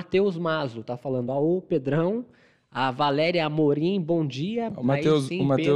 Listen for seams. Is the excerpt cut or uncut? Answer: uncut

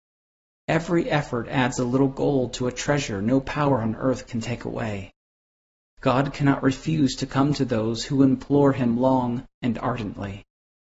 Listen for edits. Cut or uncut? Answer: cut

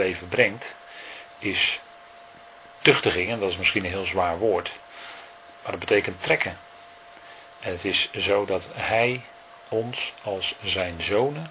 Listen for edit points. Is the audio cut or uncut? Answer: uncut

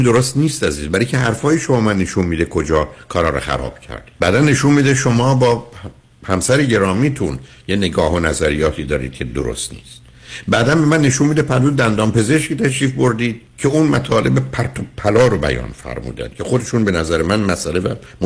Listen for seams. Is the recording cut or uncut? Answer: cut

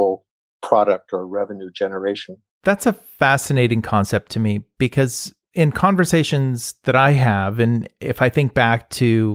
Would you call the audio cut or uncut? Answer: uncut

